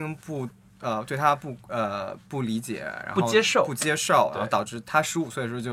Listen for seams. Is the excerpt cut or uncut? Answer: uncut